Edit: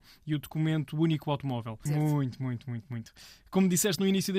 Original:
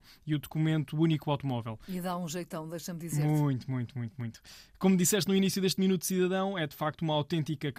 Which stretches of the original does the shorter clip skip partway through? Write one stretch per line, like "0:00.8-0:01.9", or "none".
0:01.9-0:03.1